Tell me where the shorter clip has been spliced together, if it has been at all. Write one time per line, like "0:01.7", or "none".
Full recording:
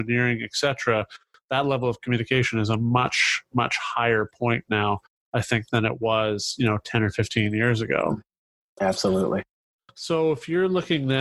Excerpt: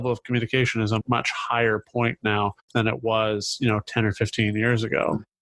0:01.0
0:02.7

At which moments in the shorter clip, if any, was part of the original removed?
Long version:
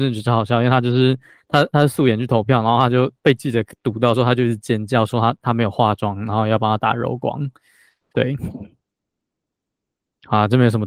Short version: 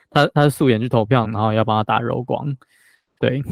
0:01.2

